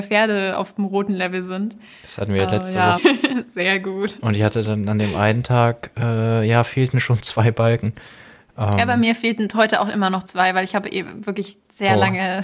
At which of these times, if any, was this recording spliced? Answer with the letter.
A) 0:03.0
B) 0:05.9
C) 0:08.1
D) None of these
A